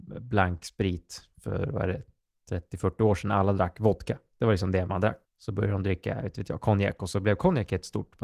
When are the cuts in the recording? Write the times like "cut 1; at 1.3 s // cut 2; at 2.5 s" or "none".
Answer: cut 1; at 5.2 s